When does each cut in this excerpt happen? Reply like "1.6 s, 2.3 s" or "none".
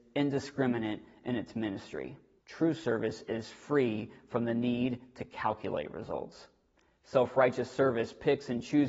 2.4 s